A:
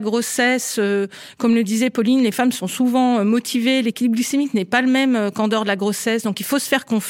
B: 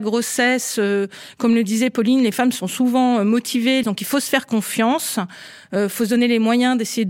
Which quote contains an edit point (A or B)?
B